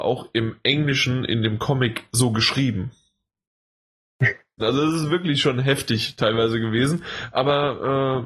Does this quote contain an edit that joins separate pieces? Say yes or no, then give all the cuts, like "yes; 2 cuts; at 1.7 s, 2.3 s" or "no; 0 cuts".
yes; 1 cut; at 4.6 s